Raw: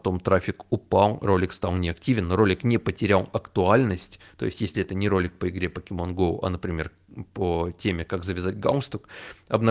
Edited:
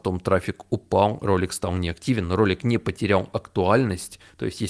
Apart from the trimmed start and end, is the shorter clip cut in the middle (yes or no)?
no